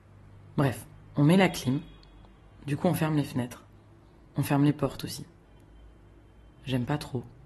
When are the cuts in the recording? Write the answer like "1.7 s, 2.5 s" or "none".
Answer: none